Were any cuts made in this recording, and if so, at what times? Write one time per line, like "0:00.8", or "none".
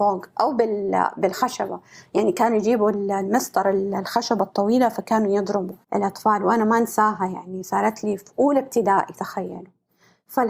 0:05.8